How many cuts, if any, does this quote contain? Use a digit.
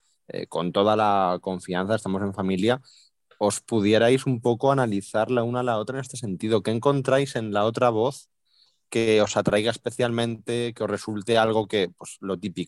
0